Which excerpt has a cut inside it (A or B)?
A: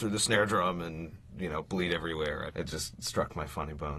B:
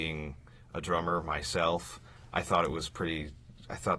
A